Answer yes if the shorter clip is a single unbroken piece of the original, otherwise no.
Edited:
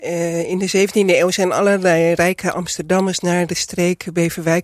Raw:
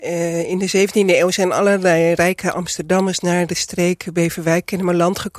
yes